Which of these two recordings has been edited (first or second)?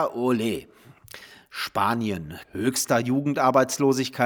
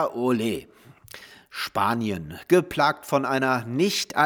first